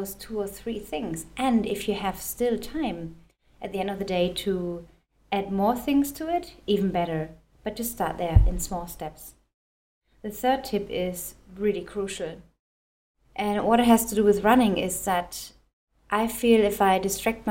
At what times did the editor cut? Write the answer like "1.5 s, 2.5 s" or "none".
none